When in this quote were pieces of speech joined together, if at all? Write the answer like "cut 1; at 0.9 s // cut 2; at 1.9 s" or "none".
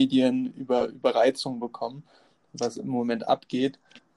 none